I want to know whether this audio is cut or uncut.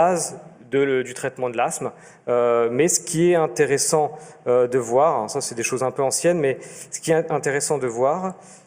uncut